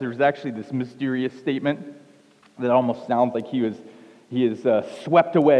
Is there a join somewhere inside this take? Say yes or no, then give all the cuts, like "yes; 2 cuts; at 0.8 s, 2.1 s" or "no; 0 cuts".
no; 0 cuts